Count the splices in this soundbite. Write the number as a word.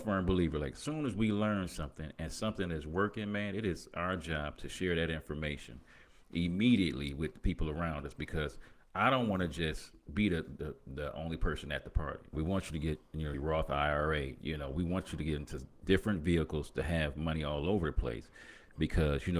two